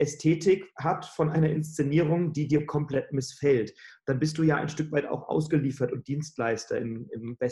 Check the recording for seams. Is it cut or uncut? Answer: uncut